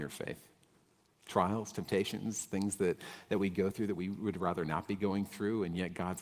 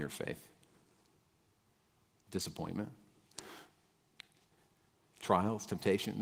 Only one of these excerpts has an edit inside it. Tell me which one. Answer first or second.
first